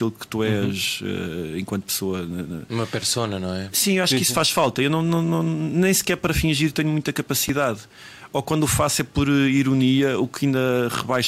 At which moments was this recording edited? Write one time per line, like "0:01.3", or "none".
none